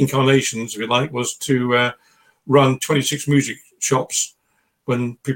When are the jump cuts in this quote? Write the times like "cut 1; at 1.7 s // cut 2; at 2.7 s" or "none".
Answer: none